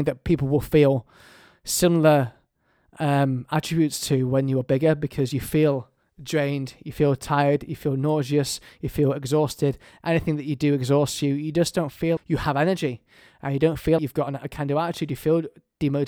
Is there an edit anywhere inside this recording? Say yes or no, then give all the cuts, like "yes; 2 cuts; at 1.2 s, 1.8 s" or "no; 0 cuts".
yes; 2 cuts; at 12.2 s, 14.0 s